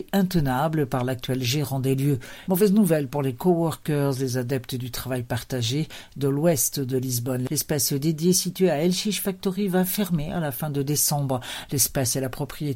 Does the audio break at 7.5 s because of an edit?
no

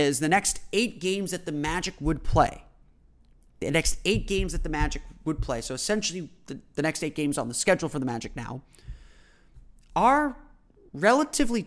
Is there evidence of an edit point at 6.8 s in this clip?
no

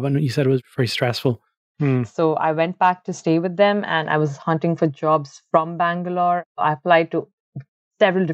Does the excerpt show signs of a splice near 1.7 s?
yes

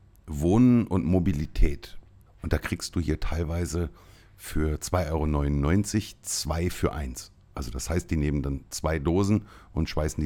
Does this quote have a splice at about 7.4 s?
no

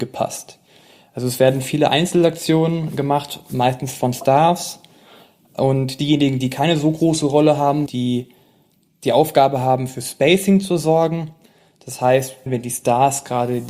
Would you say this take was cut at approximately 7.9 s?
yes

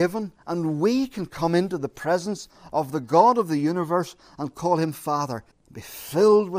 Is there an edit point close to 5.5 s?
yes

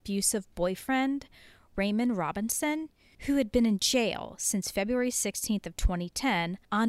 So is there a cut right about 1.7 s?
no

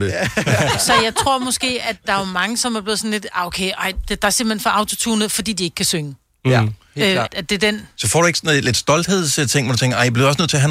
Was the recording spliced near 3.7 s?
no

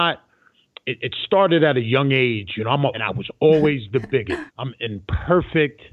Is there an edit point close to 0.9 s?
no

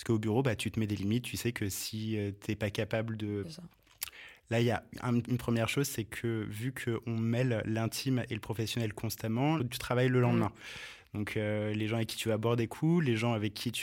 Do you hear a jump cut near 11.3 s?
no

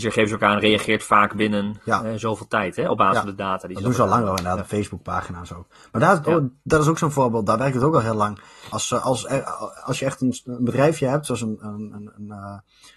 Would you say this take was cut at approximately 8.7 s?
yes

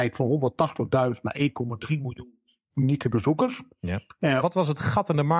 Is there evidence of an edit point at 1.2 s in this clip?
no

